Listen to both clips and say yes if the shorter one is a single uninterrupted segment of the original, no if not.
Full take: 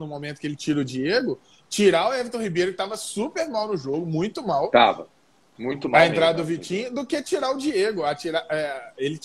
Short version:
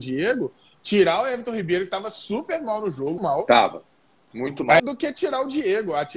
no